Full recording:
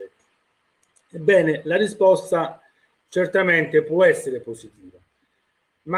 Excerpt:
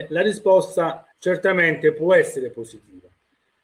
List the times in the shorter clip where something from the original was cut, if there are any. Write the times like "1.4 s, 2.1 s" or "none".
1.1 s